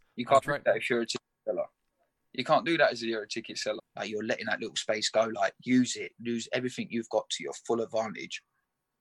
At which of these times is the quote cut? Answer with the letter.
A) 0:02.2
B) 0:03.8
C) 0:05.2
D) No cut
B